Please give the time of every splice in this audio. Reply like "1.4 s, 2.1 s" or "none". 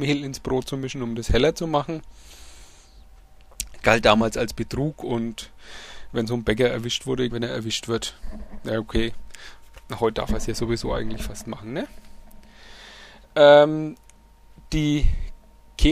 7.3 s